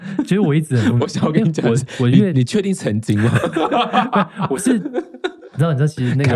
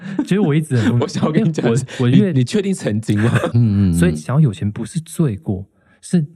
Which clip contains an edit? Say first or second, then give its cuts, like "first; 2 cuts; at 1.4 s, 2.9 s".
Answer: second; 1 cut; at 3.5 s